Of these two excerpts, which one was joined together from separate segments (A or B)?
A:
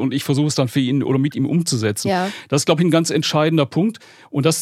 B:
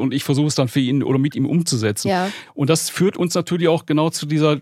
B